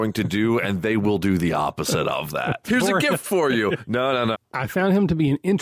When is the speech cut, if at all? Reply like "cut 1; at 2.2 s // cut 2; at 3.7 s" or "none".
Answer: cut 1; at 2.6 s // cut 2; at 4.3 s